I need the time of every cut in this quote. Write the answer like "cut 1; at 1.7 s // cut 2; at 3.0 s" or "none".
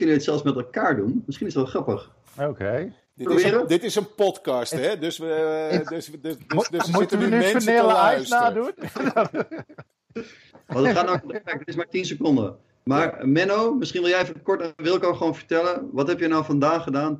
none